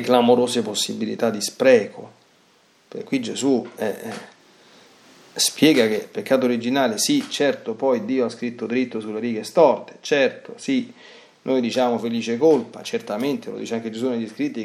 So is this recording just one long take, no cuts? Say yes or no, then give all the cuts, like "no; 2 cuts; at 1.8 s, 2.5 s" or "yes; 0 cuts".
yes; 0 cuts